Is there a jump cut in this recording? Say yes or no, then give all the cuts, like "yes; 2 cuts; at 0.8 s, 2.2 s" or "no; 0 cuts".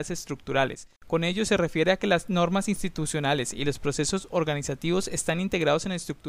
yes; 1 cut; at 1.0 s